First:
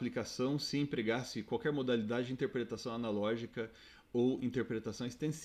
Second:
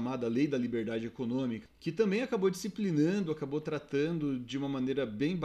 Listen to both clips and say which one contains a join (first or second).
second